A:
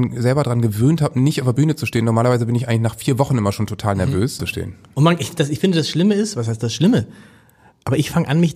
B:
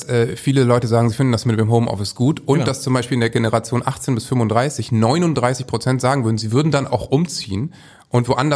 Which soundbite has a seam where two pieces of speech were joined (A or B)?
A